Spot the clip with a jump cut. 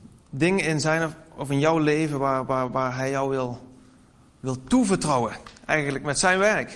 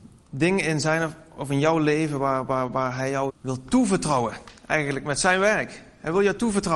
second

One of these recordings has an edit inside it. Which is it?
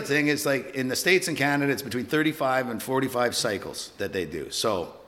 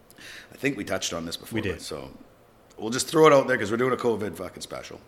second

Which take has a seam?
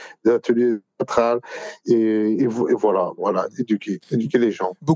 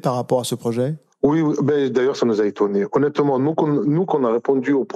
first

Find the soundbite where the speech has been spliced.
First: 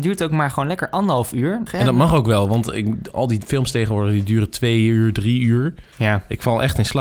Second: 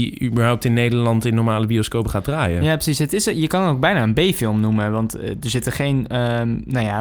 first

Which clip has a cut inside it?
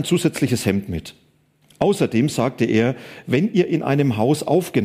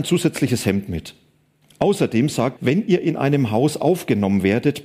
second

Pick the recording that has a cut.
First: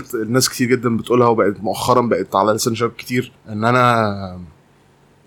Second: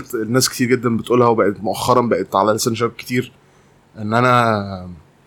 first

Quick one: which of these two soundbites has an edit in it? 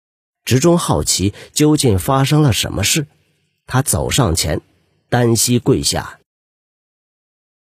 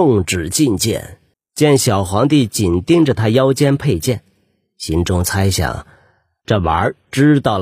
second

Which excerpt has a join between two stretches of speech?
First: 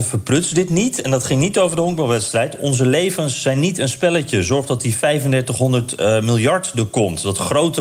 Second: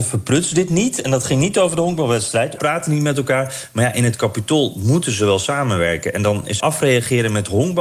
second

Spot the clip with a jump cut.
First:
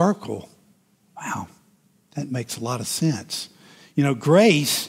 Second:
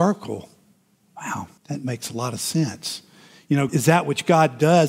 second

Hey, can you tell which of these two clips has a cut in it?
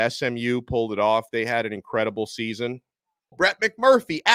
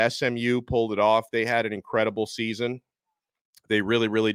first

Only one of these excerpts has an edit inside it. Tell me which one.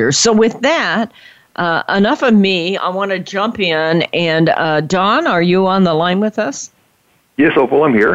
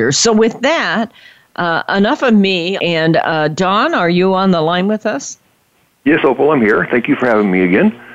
second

